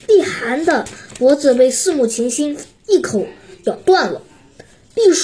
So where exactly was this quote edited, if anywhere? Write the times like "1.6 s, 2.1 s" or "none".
none